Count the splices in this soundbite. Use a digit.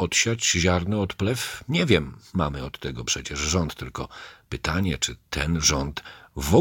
0